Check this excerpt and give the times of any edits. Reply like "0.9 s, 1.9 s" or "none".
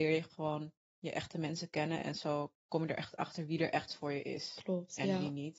none